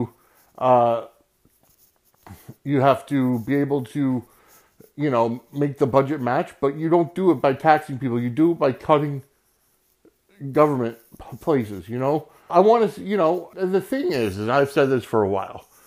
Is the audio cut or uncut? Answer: cut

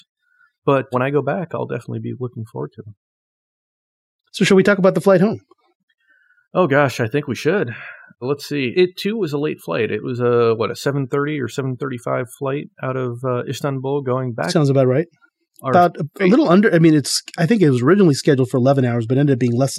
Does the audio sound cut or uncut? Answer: uncut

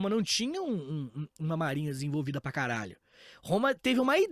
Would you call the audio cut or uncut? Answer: uncut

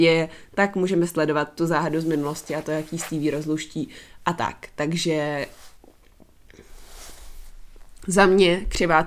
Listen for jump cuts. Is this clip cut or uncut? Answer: uncut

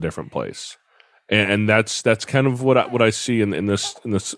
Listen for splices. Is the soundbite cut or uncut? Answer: uncut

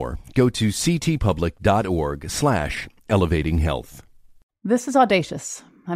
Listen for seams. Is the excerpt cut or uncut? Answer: uncut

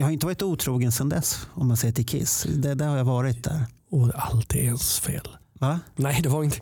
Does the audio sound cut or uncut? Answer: cut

